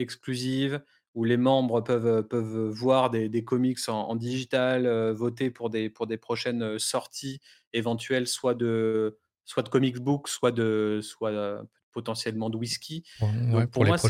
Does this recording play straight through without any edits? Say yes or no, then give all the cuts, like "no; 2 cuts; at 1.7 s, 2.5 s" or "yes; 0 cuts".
yes; 0 cuts